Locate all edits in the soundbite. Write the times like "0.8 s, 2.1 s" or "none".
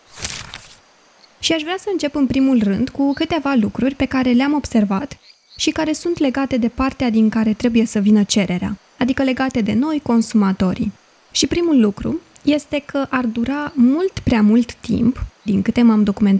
15.5 s

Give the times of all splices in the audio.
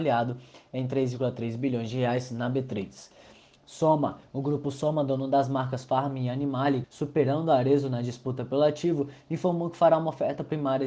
6.8 s

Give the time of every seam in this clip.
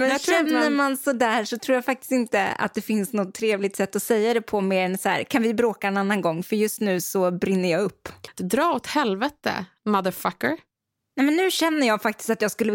8.3 s

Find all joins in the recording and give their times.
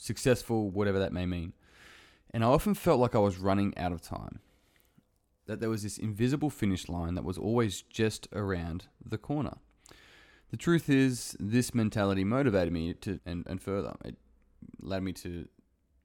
13.2 s

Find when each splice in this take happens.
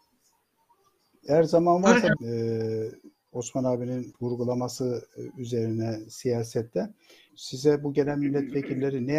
2.2 s, 7.3 s

